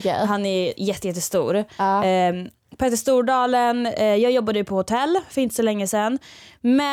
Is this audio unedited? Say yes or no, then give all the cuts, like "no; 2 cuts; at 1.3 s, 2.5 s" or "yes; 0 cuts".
yes; 0 cuts